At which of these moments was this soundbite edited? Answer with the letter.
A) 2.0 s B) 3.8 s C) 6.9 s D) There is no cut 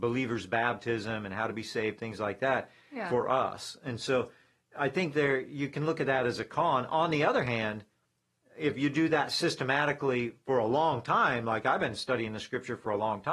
D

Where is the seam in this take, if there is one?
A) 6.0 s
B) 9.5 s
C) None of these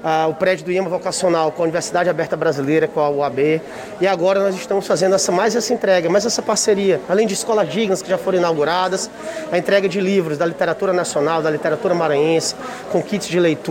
C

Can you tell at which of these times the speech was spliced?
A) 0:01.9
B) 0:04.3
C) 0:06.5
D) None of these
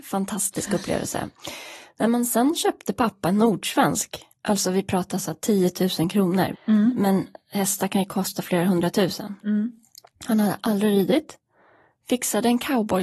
C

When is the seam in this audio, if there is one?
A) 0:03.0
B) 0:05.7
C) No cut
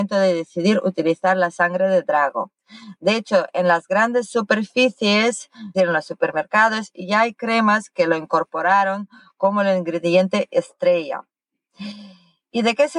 B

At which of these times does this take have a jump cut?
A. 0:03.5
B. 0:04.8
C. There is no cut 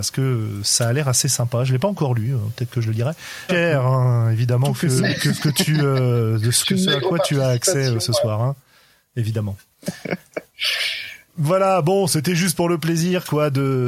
A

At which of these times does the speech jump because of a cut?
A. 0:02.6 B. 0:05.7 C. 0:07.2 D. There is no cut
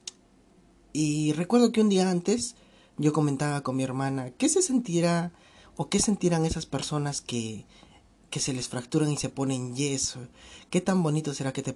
D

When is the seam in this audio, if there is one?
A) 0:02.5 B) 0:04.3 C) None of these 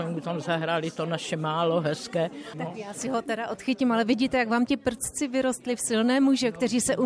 A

